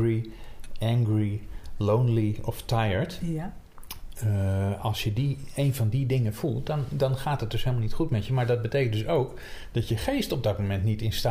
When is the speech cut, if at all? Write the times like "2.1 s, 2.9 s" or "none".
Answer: none